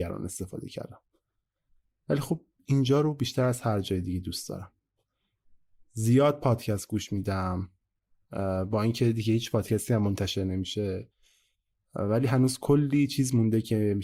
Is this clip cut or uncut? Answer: uncut